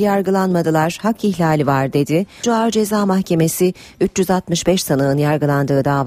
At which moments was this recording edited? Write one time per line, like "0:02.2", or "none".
0:02.4

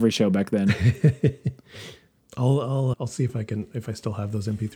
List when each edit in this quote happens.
0:02.9

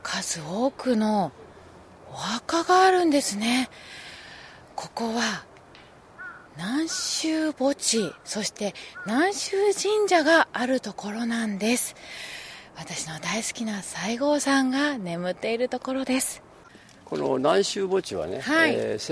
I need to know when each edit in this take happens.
0:06.5

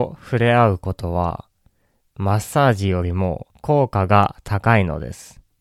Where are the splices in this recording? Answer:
0:02.1
0:03.5

